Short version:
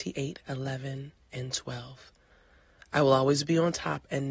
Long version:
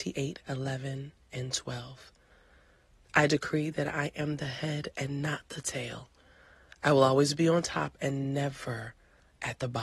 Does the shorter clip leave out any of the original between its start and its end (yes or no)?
yes